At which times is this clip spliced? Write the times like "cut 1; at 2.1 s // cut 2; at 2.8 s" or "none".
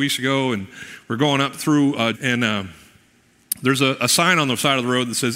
cut 1; at 2.1 s